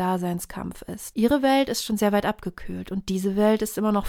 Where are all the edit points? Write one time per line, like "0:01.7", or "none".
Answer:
0:01.1